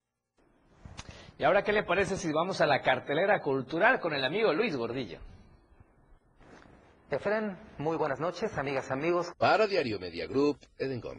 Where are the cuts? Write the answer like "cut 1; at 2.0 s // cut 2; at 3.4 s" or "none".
cut 1; at 9.3 s